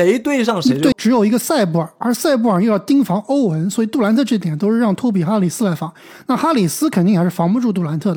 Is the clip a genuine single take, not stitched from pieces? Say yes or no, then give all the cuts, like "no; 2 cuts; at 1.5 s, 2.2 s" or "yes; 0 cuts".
no; 1 cut; at 0.9 s